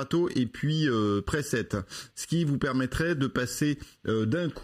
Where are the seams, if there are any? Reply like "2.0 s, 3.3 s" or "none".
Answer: none

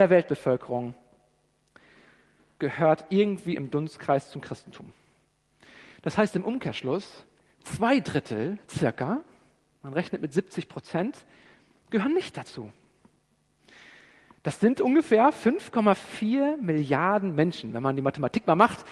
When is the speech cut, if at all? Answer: none

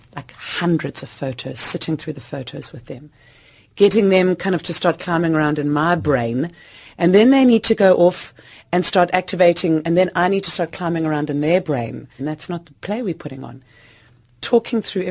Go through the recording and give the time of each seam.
12.2 s

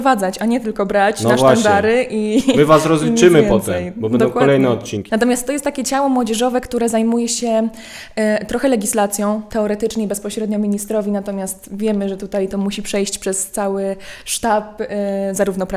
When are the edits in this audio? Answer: 5.1 s, 9.5 s

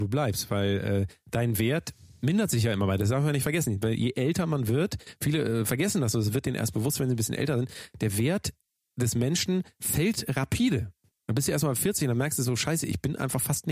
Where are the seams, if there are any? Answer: 11.1 s

